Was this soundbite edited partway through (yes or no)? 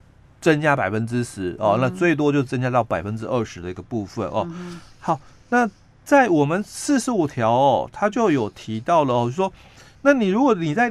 no